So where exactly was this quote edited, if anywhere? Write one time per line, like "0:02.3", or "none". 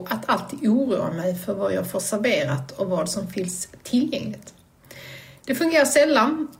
none